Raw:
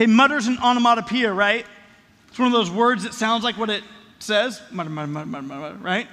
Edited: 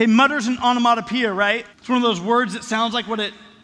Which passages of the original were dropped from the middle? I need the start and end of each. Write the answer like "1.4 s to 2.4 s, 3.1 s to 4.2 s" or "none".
1.7 s to 2.2 s